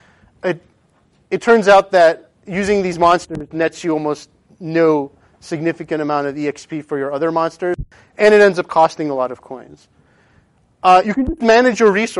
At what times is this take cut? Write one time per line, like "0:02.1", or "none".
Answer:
none